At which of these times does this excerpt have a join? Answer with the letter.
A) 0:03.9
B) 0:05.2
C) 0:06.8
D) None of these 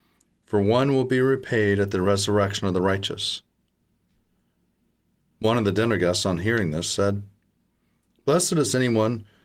D